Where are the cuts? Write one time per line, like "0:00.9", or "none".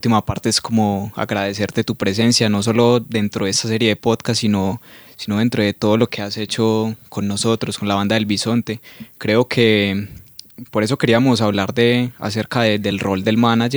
none